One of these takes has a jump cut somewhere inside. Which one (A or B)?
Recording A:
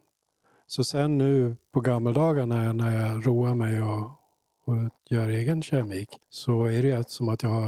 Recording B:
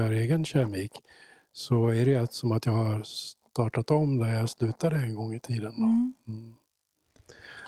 A